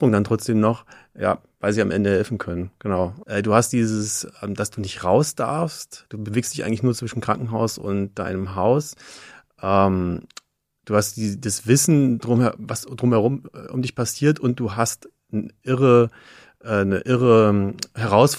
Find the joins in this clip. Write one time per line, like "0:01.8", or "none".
0:03.2